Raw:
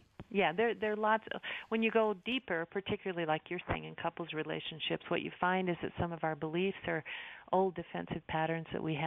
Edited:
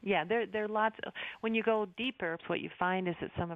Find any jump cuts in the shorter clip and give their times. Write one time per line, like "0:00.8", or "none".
0:02.4